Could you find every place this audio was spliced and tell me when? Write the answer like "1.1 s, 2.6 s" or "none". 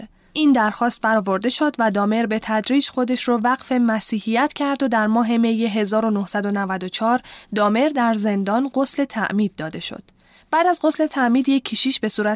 none

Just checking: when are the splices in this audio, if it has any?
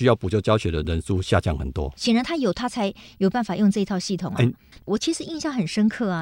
2.0 s, 4.7 s

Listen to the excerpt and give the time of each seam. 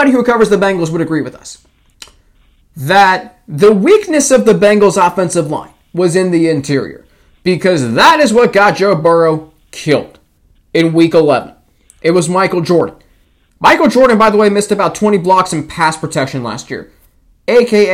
none

